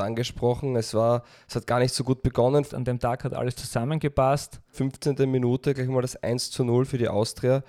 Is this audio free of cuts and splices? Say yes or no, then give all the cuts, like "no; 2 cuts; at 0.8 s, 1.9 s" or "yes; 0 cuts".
no; 2 cuts; at 2.7 s, 4.7 s